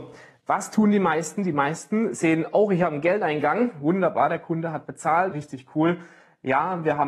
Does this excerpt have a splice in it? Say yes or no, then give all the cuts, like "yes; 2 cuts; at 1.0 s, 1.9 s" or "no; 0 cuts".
yes; 1 cut; at 5.3 s